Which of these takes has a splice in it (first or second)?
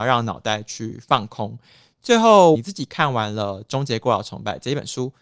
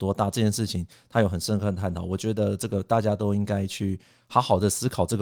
first